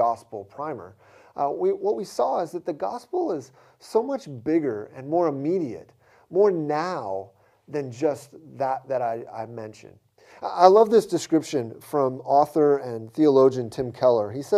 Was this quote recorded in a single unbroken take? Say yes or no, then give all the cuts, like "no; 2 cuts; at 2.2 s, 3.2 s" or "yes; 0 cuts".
yes; 0 cuts